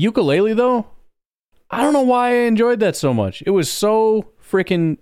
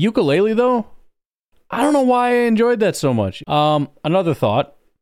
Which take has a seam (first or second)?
second